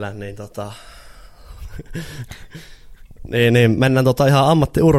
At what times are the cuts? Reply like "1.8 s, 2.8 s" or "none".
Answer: none